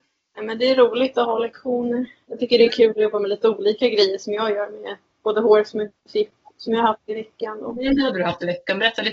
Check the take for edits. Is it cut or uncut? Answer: uncut